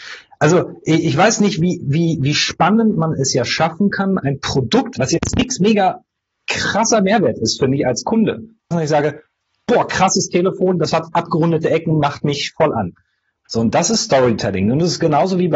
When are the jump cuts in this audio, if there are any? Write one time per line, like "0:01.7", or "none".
0:05.0
0:08.7
0:13.5